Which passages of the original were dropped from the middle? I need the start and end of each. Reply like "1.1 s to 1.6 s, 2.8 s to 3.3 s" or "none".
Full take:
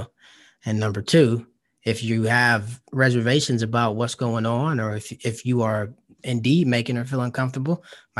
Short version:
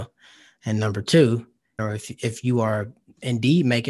1.8 s to 4.8 s